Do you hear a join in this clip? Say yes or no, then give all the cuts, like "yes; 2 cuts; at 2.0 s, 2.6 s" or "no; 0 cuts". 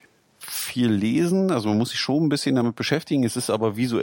no; 0 cuts